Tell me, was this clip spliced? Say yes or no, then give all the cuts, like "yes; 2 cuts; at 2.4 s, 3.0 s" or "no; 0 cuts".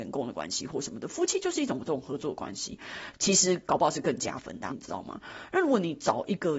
yes; 2 cuts; at 3.1 s, 4.7 s